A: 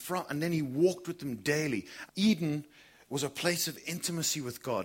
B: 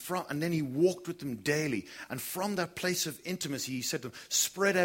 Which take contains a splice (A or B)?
A